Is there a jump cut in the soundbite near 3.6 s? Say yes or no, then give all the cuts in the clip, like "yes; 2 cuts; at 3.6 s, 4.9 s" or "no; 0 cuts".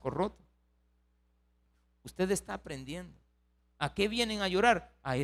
yes; 1 cut; at 3.6 s